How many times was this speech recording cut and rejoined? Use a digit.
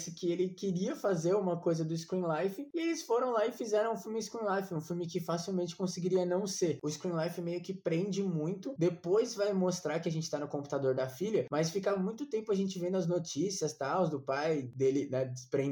2